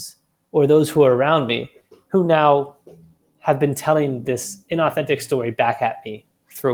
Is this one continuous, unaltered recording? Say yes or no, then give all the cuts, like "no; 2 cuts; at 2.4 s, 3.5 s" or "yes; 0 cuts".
yes; 0 cuts